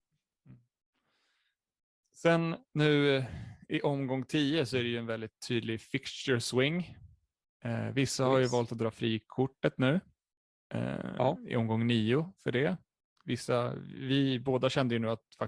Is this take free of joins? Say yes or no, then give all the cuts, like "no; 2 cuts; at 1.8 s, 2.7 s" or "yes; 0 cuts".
yes; 0 cuts